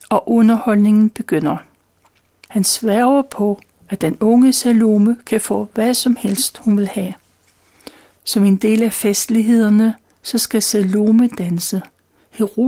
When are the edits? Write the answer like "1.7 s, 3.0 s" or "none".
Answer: 2.5 s, 8.1 s